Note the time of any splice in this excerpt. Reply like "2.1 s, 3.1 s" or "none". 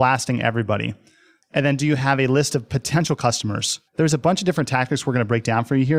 1.4 s, 3.9 s